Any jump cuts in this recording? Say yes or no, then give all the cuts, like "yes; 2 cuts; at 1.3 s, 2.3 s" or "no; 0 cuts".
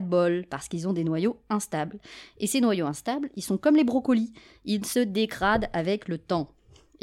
no; 0 cuts